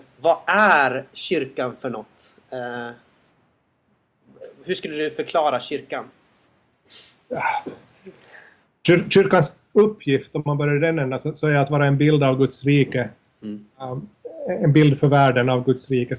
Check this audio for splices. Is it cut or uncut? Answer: uncut